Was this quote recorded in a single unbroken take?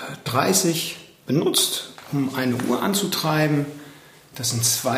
yes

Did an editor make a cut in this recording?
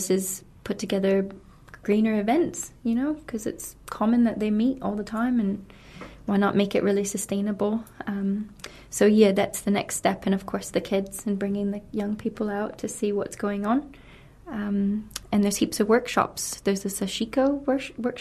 no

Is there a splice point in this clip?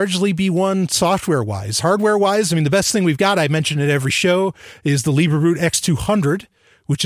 no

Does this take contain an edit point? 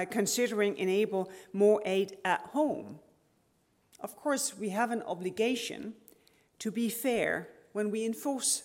no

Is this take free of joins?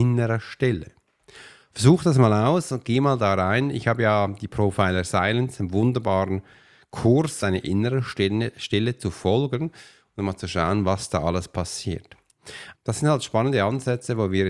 no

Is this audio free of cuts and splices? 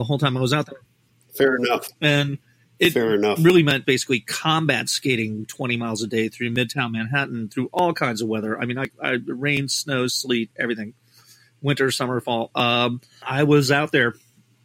no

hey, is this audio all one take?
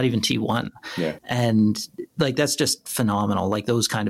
no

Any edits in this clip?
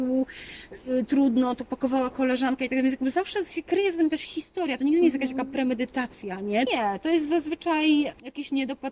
yes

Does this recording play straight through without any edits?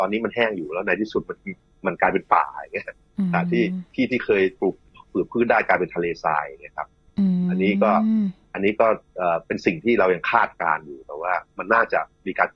yes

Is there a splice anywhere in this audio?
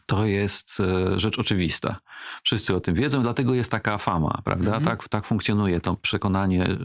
no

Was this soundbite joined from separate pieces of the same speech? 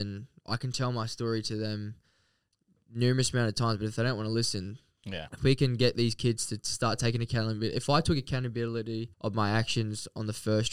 yes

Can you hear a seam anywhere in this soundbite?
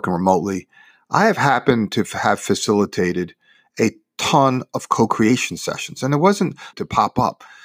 yes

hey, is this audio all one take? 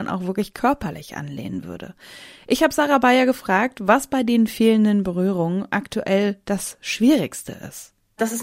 yes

